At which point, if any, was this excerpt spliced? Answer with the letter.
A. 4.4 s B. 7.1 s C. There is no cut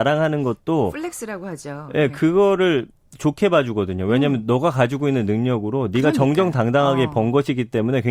C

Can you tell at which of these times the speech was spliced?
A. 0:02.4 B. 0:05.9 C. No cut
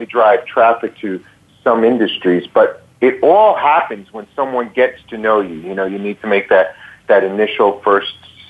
C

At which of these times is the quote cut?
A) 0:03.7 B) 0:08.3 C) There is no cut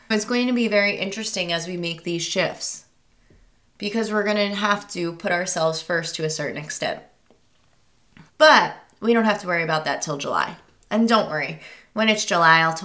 B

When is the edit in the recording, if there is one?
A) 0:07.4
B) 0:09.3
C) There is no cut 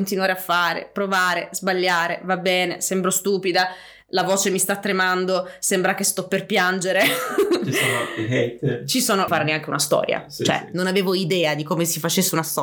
B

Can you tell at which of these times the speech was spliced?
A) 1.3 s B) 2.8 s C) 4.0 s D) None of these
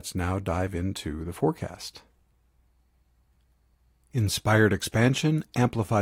D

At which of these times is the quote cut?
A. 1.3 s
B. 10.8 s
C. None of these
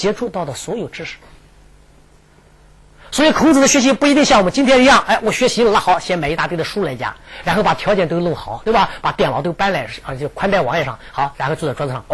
B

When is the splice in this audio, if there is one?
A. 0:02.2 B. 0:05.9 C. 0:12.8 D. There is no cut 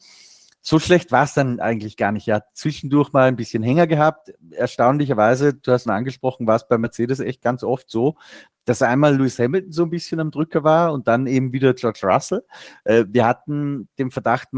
B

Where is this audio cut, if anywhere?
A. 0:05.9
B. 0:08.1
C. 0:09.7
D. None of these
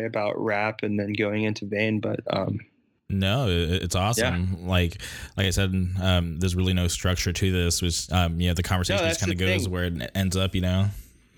B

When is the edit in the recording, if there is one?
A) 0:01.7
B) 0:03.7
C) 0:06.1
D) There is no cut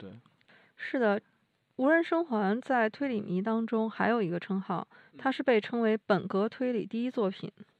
D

